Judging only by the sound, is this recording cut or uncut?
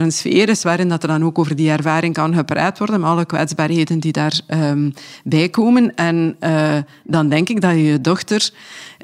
uncut